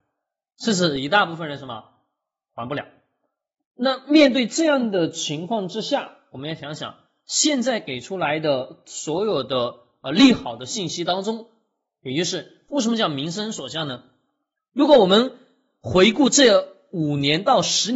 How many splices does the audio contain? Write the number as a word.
one